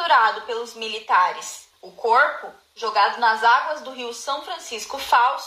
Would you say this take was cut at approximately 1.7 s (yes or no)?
yes